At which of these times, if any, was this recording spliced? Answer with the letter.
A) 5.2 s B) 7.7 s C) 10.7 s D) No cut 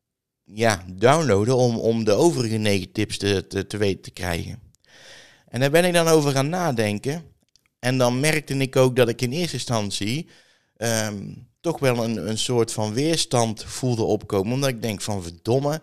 D